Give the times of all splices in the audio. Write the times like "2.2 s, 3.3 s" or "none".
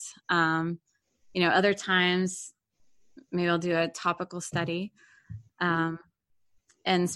none